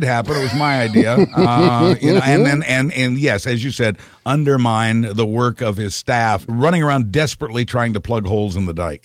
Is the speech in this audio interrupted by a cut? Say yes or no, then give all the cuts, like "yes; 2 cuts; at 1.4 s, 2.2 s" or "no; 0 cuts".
yes; 1 cut; at 6.5 s